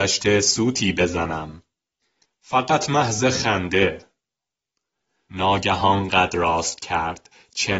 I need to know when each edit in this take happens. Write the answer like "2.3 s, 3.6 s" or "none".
2.2 s